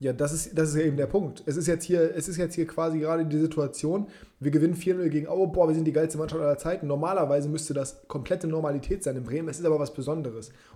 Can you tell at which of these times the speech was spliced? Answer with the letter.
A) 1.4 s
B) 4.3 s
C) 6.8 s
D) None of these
D